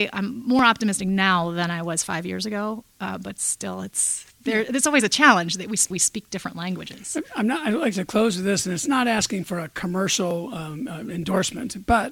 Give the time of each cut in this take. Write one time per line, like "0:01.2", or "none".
0:05.9